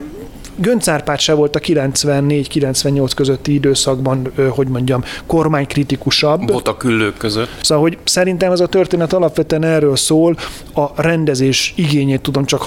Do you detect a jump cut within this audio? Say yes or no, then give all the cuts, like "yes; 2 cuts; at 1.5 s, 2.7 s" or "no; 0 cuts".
yes; 1 cut; at 7.6 s